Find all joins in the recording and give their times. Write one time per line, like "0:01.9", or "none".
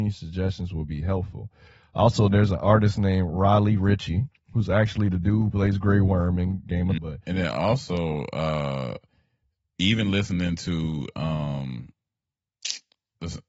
0:07.0